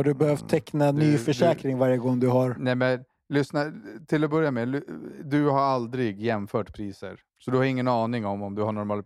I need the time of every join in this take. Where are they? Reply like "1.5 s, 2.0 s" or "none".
7.3 s